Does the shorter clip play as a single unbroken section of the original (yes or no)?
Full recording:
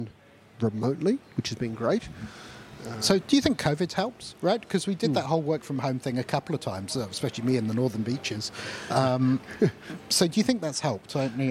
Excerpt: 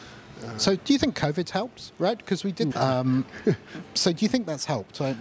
no